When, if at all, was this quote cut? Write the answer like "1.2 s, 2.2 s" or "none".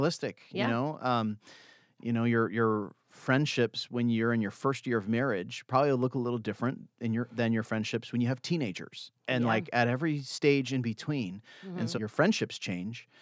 11.9 s